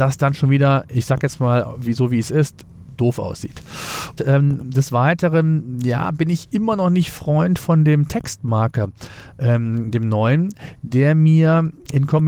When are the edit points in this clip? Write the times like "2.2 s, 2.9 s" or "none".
4.2 s